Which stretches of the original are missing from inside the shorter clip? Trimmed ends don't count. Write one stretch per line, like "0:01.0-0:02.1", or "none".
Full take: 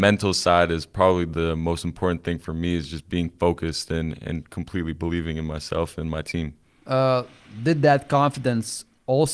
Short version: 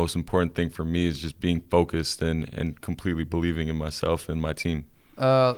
none